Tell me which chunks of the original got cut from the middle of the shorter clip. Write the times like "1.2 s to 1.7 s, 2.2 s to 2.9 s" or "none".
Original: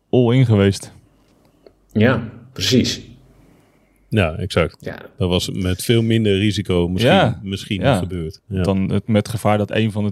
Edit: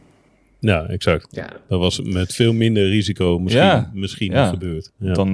none